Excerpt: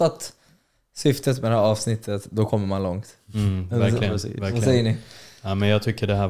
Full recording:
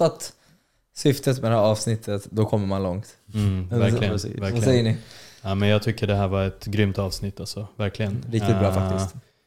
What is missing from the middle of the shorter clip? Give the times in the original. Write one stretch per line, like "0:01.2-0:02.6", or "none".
none